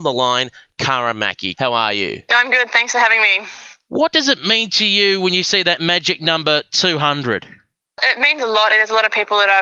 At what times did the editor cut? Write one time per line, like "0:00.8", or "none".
0:01.5
0:08.7